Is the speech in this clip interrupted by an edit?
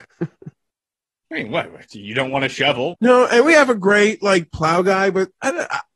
yes; 1 cut; at 2.9 s

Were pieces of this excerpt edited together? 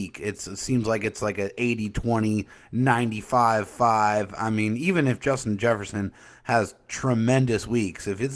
no; 0 cuts

